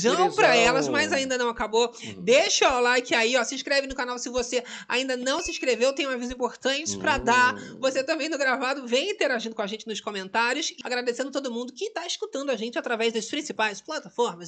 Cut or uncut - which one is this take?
cut